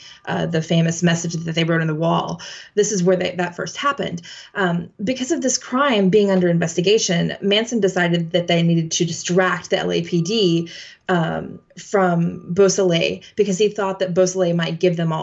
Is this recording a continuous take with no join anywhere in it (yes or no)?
yes